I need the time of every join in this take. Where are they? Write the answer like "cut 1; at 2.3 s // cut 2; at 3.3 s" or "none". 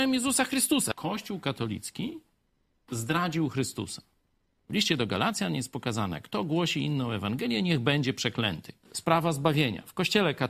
none